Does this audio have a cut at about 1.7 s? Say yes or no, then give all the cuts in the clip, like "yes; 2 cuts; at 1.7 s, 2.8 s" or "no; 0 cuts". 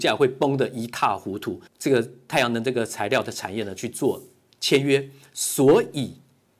yes; 1 cut; at 1.7 s